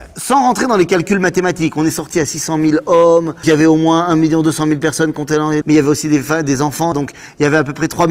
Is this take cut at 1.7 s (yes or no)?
no